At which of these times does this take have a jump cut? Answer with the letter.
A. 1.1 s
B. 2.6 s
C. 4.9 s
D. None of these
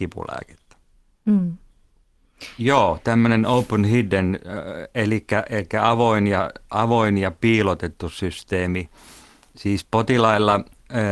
B